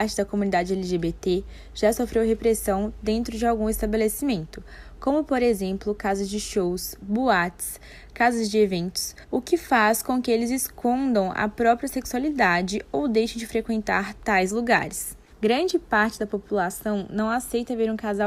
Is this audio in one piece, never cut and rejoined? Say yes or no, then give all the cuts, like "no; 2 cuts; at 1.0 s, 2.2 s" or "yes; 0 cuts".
no; 2 cuts; at 9.2 s, 15.3 s